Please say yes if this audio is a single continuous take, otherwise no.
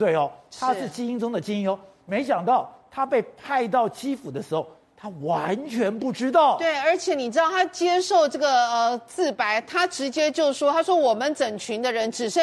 yes